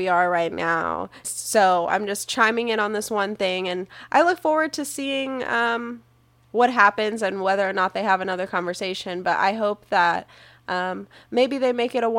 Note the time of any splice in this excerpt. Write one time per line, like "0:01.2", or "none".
0:01.2

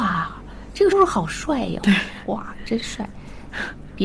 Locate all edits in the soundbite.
0:00.9

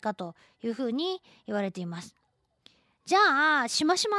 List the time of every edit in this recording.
none

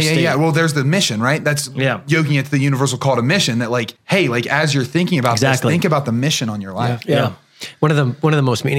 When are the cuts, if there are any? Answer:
0:04.0

